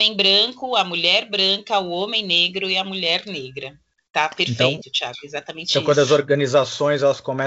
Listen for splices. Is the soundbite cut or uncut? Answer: uncut